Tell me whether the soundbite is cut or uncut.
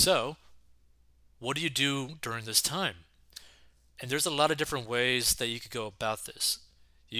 uncut